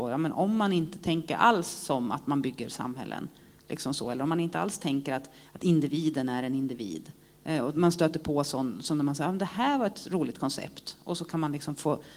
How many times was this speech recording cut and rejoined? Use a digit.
0